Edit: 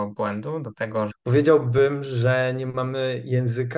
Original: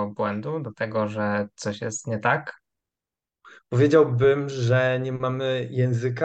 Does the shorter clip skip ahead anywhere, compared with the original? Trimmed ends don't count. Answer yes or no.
yes